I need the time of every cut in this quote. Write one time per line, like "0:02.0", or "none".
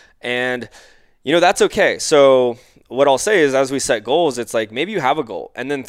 none